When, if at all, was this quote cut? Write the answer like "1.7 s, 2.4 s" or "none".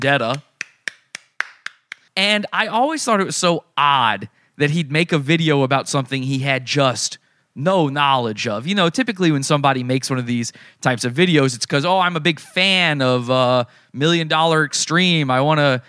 2.1 s